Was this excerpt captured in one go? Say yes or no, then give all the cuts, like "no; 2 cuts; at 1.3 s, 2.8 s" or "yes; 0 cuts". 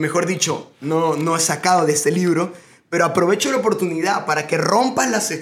yes; 0 cuts